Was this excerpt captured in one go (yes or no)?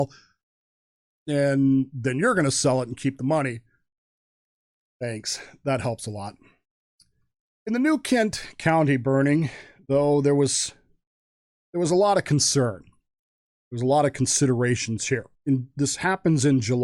no